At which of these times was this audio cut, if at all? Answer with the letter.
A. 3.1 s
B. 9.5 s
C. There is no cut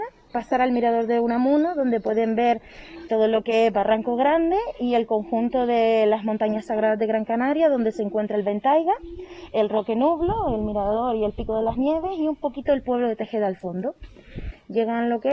A